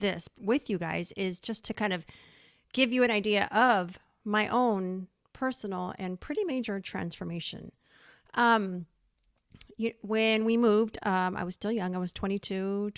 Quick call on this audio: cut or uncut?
uncut